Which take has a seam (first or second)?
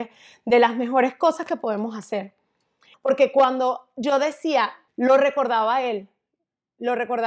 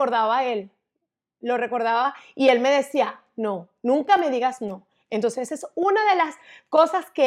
first